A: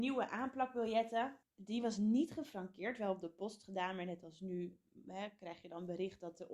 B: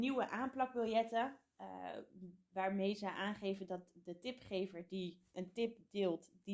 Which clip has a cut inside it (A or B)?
A